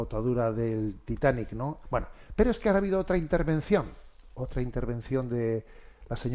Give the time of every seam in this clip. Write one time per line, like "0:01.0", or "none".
0:01.8